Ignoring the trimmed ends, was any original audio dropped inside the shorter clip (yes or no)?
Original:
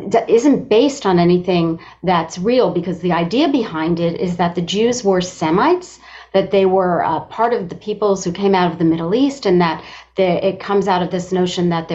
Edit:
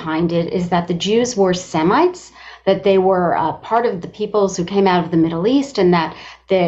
no